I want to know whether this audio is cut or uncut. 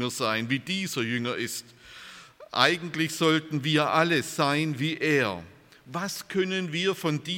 uncut